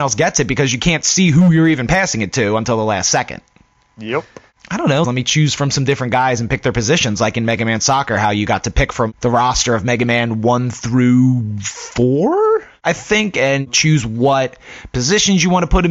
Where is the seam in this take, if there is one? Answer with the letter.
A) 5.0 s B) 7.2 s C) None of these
A